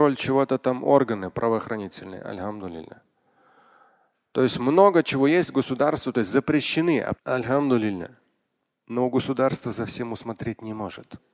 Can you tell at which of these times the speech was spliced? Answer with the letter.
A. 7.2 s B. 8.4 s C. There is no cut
A